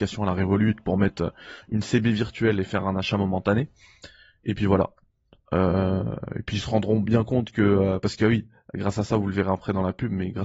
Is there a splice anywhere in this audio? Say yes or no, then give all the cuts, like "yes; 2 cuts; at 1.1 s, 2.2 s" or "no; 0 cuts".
no; 0 cuts